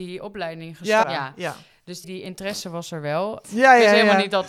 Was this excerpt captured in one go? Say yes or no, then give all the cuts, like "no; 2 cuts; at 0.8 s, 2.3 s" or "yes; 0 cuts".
no; 3 cuts; at 1.0 s, 2.0 s, 3.4 s